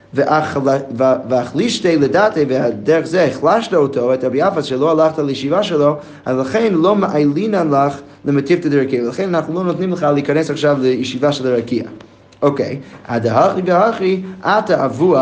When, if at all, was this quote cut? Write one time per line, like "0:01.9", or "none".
none